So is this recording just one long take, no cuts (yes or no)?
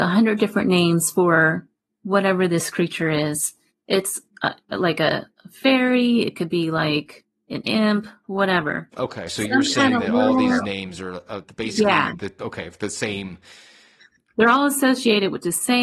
no